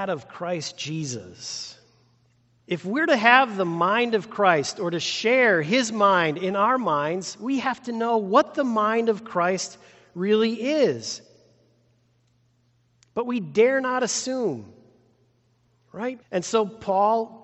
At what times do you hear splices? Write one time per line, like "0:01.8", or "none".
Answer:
0:02.6
0:16.2